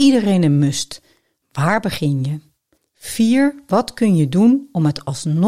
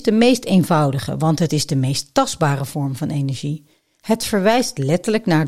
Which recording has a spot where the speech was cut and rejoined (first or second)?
first